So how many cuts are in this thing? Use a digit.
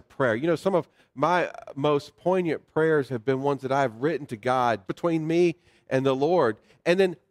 2